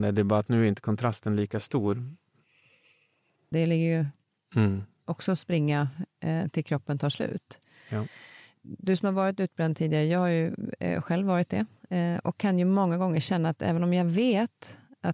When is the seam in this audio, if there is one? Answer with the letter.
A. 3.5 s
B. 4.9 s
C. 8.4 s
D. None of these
A